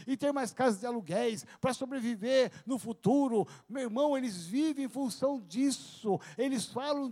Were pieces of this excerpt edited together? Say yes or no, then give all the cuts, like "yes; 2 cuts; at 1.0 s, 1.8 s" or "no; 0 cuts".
no; 0 cuts